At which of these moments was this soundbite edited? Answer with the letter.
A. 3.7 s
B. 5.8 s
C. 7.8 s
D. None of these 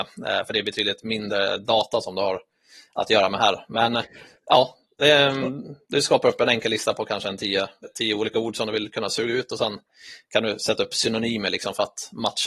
C